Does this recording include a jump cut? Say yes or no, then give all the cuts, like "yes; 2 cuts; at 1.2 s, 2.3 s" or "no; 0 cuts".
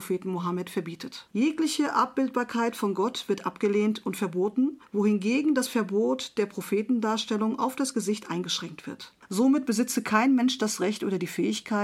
yes; 2 cuts; at 1.3 s, 9.2 s